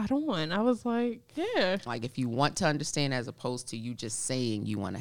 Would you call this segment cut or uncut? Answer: cut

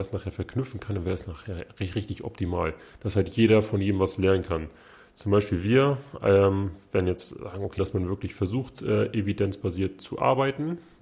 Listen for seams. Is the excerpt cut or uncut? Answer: cut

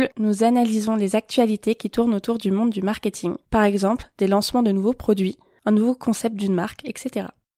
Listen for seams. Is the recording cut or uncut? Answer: uncut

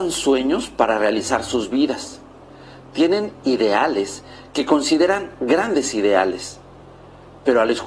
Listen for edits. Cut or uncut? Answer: uncut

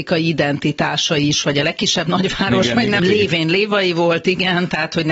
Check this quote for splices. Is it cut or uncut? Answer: cut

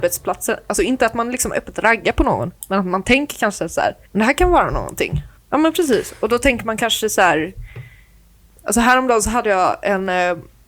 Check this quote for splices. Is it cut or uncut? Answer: cut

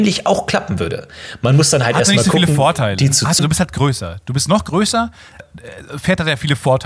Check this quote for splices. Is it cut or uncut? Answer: cut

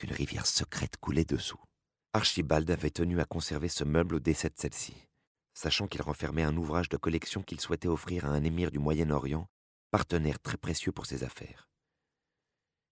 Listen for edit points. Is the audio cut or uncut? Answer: cut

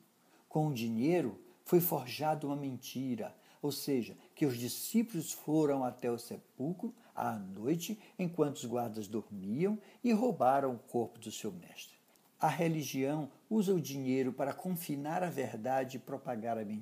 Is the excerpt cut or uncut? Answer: uncut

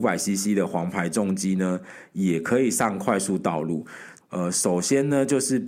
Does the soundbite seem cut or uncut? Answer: cut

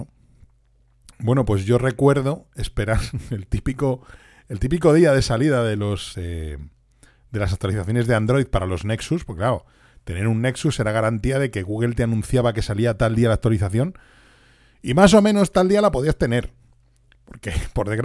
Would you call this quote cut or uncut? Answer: cut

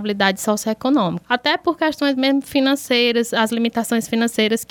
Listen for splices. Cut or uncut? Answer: cut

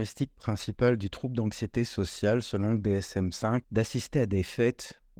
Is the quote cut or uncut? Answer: cut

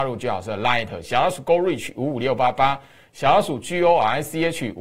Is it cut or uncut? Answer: uncut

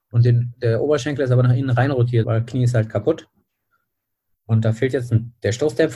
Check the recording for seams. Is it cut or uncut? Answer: cut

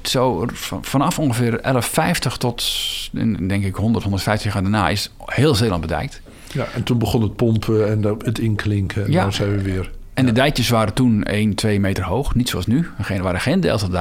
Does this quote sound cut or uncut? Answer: uncut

